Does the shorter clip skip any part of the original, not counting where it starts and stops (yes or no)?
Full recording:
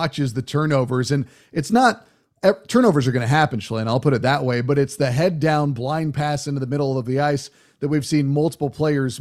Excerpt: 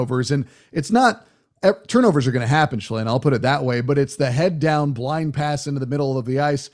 no